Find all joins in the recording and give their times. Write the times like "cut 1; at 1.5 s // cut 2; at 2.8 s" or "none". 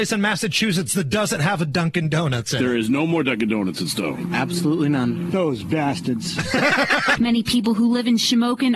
cut 1; at 7.2 s